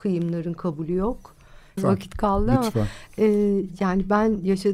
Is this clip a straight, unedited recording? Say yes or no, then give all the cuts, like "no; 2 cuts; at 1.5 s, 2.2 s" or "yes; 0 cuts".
no; 1 cut; at 1.8 s